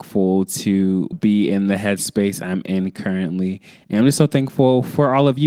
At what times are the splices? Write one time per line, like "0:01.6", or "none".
0:01.1